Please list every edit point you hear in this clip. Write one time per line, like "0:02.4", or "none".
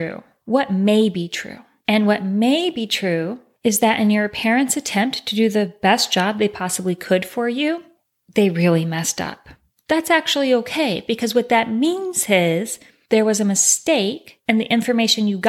none